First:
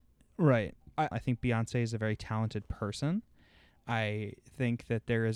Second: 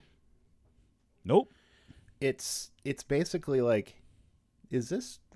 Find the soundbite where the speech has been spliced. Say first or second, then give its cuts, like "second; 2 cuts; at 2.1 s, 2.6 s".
first; 1 cut; at 1.1 s